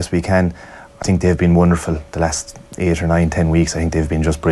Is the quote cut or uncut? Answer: cut